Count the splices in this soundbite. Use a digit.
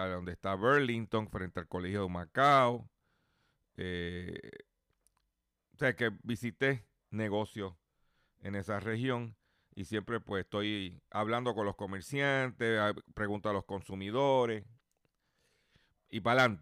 0